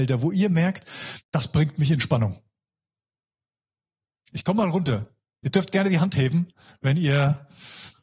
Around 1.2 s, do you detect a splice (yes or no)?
yes